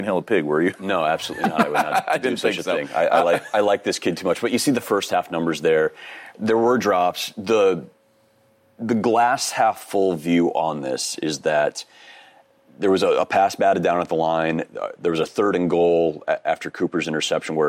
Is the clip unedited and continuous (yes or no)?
yes